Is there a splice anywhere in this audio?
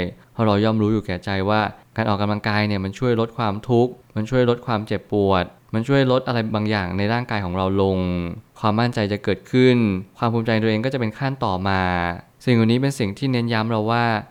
no; 0 cuts

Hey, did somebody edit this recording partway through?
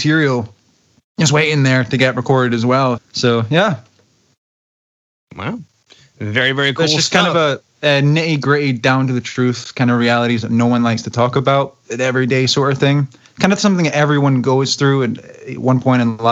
yes; 1 cut; at 3.0 s

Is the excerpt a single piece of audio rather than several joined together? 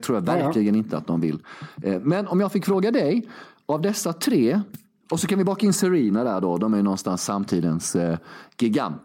yes; 0 cuts

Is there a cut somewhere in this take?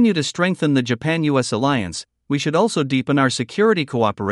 no; 0 cuts

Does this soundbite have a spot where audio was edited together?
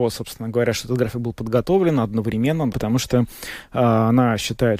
yes; 1 cut; at 2.7 s

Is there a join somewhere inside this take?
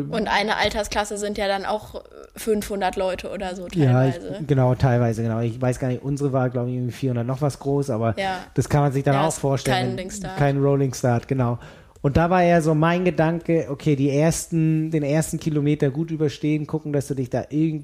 yes; 1 cut; at 10.0 s

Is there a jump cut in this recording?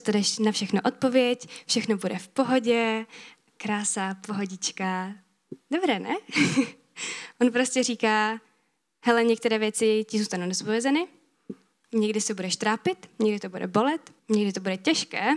yes; 1 cut; at 14.2 s

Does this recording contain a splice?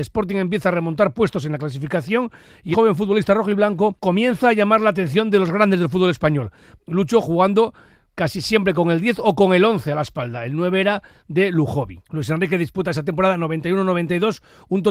yes; 1 cut; at 2.7 s

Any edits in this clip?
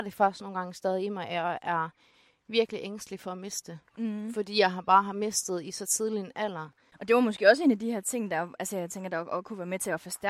yes; 1 cut; at 6.9 s

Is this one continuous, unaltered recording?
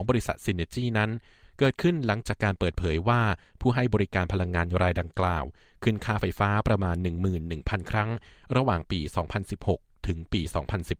yes; 0 cuts

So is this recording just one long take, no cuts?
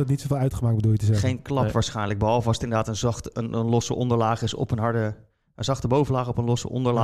yes; 0 cuts

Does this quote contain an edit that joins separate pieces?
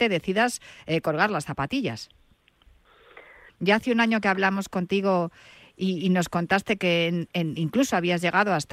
yes; 1 cut; at 3.5 s

